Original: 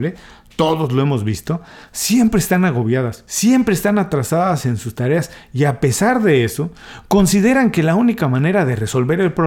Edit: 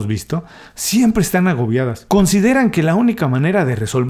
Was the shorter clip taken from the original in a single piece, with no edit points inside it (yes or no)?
no